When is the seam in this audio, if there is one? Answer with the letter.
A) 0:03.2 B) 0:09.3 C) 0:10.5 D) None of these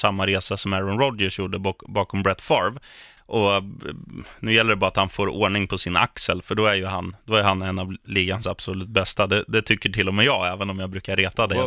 A